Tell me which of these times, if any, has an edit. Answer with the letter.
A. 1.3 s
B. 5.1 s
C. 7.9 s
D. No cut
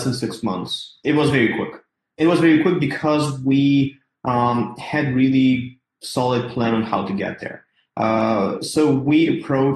D